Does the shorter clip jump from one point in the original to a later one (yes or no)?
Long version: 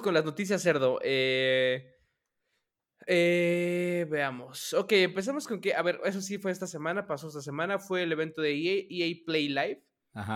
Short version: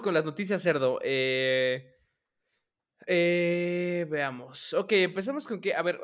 no